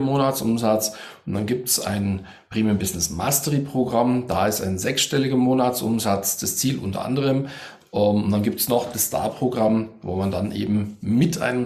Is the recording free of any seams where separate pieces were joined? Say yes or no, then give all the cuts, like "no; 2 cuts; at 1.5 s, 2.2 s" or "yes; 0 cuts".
yes; 0 cuts